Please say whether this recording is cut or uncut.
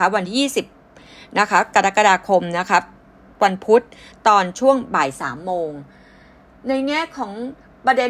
uncut